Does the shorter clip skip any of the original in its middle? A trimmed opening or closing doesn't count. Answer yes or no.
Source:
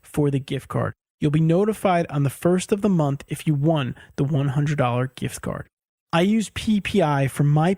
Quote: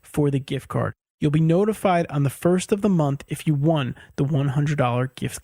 no